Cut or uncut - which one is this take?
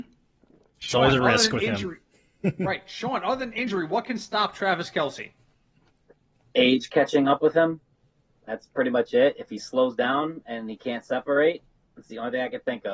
uncut